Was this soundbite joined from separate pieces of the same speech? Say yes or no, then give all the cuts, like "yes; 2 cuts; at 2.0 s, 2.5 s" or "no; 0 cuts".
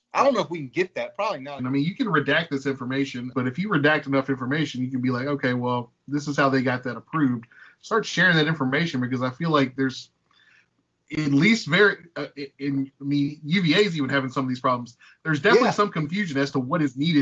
yes; 2 cuts; at 1.6 s, 3.3 s